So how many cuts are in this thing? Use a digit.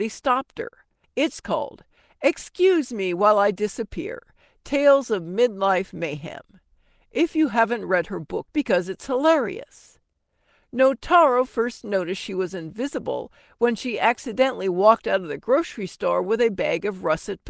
2